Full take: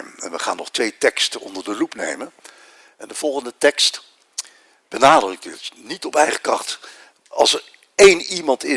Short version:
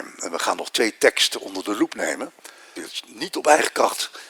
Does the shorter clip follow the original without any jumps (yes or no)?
no